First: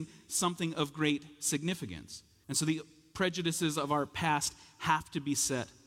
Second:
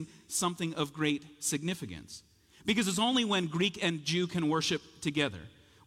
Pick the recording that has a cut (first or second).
first